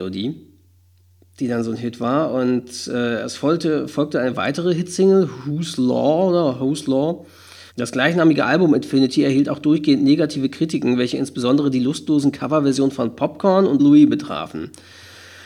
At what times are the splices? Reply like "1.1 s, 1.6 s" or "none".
7.7 s, 13.8 s